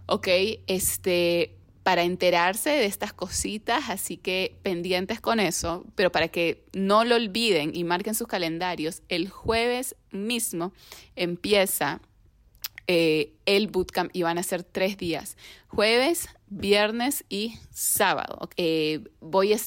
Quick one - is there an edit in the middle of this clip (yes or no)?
yes